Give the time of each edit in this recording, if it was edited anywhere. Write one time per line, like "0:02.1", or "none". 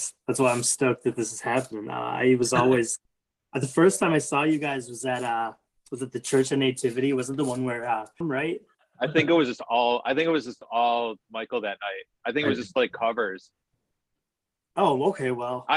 0:08.2